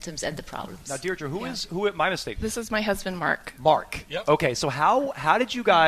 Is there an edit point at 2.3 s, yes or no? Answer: yes